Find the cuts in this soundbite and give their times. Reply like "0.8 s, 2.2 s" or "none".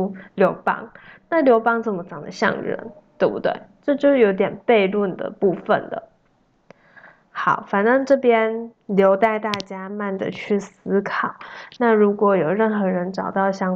9.9 s

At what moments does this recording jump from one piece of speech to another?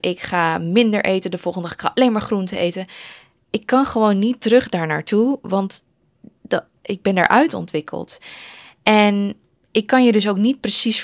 6.8 s

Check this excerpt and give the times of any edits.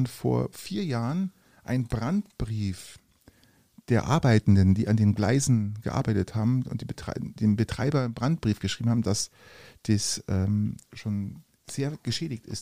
none

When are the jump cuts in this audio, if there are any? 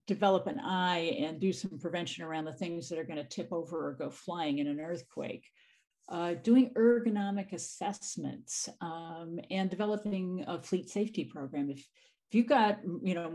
none

